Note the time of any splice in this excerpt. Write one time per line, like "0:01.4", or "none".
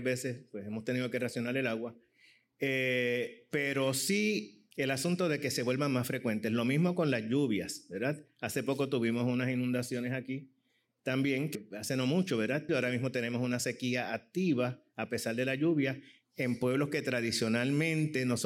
0:04.7
0:11.5
0:12.7